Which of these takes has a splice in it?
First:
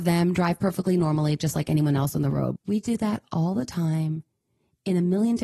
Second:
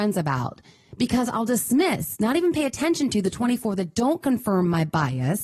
first; 1 cut; at 2.6 s

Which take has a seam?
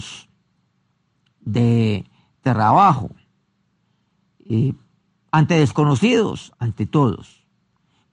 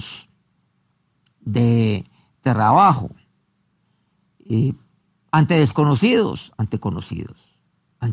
first; 1 cut; at 6.5 s

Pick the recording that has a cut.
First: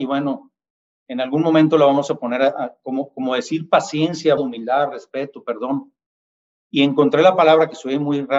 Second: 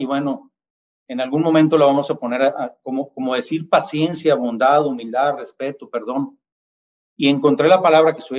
first; 1 cut; at 4.4 s

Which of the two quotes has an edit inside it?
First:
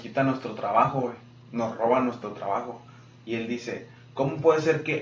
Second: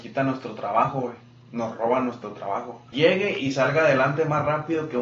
second; 1 cut; at 2.9 s

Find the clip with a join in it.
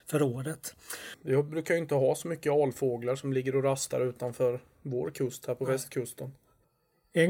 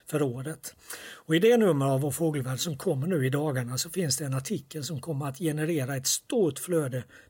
first; 1 cut; at 1.1 s

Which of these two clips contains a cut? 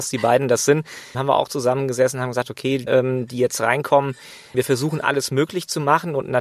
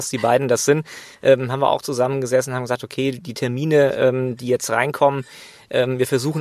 first; 3 cuts; at 1.1 s, 2.9 s, 4.5 s

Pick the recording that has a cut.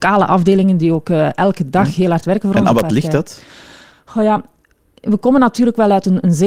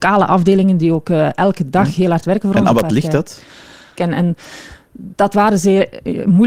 second; 1 cut; at 4.0 s

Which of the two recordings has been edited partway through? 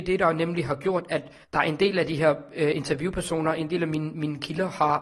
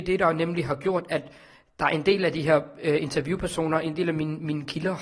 first; 1 cut; at 1.4 s

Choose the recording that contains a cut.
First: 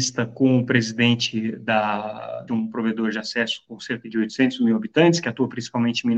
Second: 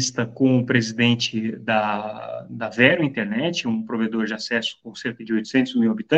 first; 1 cut; at 2.5 s

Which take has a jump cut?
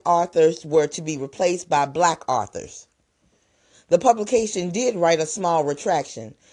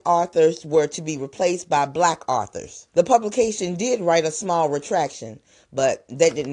second; 1 cut; at 2.9 s

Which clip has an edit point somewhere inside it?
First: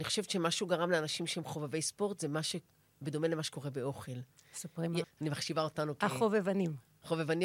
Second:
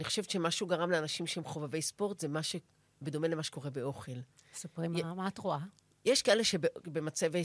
first; 1 cut; at 5.0 s

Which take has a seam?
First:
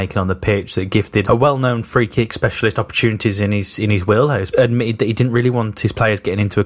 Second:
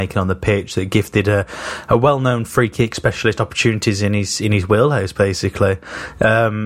first; 2 cuts; at 1.2 s, 4.5 s

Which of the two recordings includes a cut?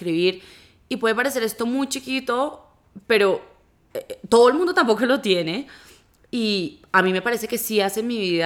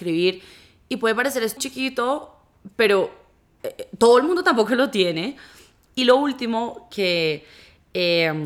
second; 2 cuts; at 1.6 s, 5.9 s

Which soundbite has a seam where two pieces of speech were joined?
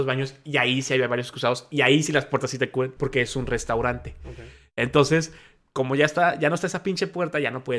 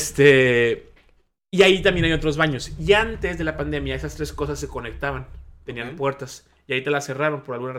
first; 1 cut; at 3.0 s

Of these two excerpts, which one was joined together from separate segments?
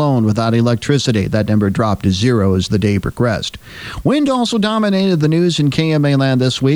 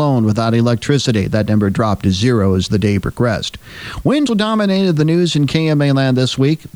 second; 1 cut; at 4.3 s

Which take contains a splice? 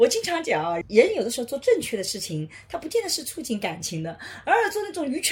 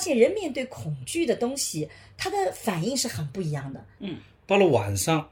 second; 1 cut; at 4.0 s

